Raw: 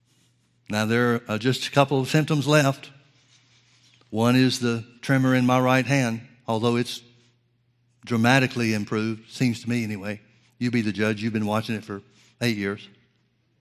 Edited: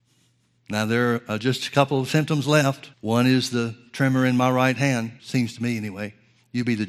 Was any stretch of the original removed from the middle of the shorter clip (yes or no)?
yes